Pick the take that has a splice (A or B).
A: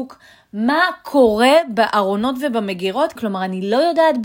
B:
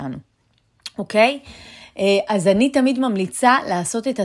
A